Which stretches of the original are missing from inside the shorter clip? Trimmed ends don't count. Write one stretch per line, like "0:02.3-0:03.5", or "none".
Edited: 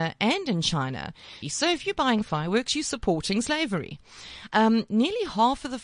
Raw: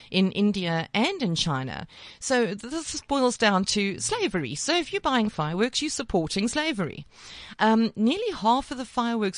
0:02.2-0:04.5